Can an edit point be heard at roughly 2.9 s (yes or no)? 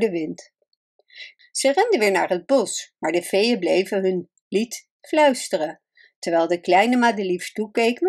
no